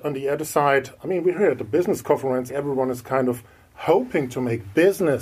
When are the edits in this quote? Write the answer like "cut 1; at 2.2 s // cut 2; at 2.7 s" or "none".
cut 1; at 1.0 s // cut 2; at 2.5 s